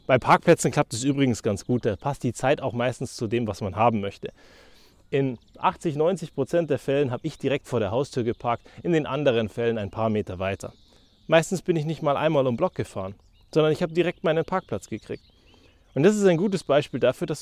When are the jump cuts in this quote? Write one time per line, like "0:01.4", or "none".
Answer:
none